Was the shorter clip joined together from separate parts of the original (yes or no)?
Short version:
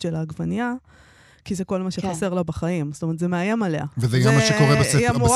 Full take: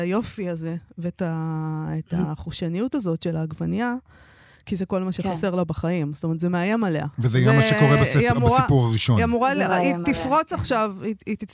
no